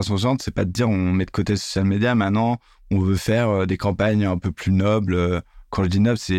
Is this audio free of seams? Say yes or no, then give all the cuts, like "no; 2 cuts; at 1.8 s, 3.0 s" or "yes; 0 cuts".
yes; 0 cuts